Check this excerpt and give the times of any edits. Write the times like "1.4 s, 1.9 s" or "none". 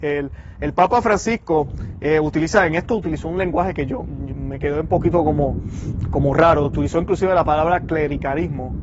none